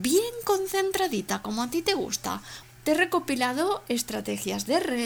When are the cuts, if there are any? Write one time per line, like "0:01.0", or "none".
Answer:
0:02.6

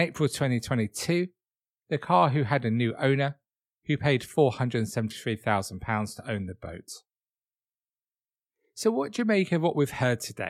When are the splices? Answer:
none

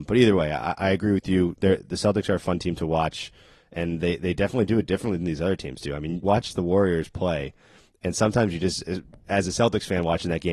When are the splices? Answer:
0:06.2

